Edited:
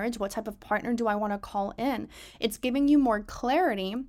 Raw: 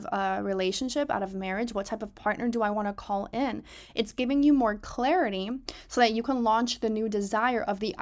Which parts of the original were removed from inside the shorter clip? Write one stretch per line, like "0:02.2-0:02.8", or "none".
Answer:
none